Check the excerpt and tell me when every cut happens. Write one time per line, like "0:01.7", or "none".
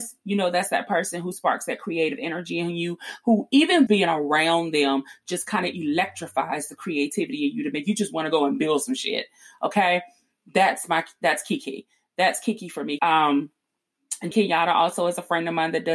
0:03.9
0:13.0
0:14.3